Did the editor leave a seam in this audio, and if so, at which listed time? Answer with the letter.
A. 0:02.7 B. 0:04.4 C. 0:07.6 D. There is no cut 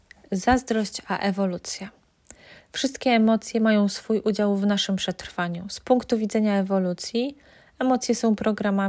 D